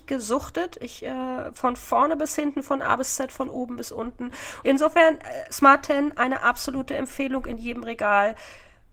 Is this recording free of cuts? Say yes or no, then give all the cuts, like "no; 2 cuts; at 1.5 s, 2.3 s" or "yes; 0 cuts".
no; 1 cut; at 4.6 s